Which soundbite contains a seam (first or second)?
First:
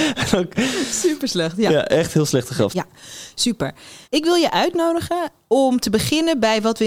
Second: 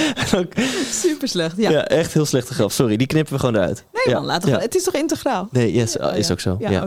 first